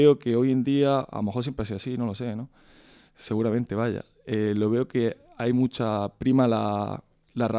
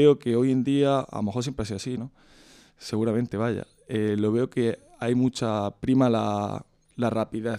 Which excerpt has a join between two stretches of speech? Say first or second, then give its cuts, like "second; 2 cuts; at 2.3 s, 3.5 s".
second; 1 cut; at 2.0 s